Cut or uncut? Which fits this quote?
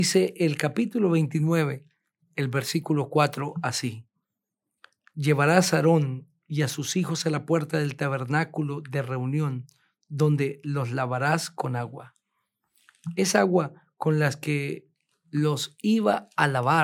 uncut